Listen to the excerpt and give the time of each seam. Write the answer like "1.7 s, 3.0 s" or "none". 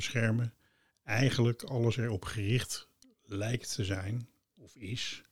none